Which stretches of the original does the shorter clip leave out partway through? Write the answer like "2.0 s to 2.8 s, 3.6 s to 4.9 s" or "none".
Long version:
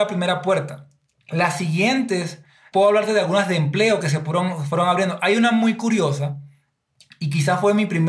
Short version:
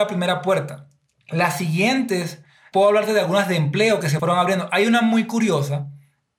4.2 s to 4.7 s